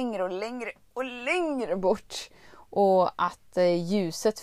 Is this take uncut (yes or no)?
yes